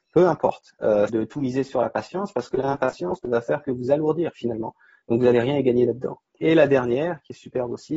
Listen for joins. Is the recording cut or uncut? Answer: cut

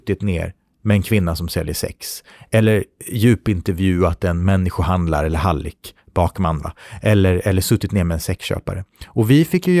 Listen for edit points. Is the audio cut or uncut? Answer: uncut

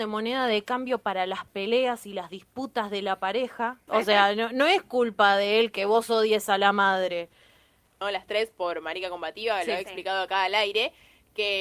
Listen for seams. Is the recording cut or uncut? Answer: cut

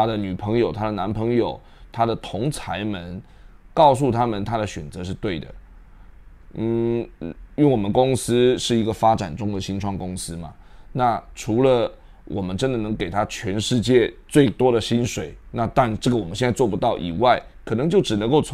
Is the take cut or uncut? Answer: uncut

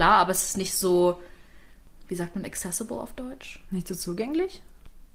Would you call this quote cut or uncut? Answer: uncut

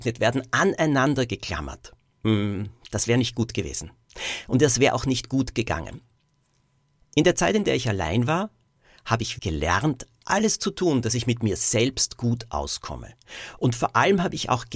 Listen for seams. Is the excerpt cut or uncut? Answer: cut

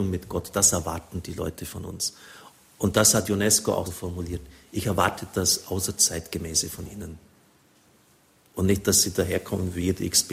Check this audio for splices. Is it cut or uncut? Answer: cut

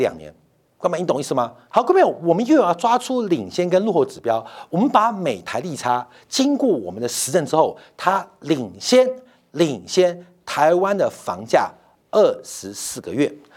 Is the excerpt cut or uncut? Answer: cut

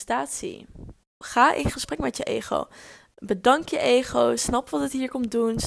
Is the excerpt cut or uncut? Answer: cut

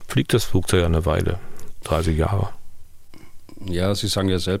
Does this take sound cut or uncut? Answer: cut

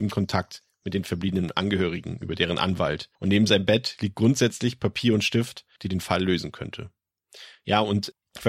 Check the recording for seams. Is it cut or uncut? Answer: cut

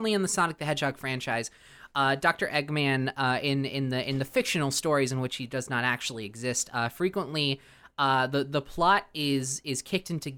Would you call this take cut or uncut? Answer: uncut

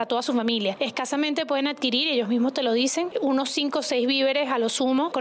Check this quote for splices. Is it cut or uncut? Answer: uncut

